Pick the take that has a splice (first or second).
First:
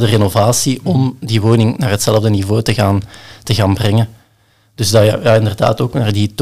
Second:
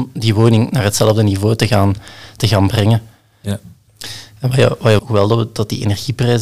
second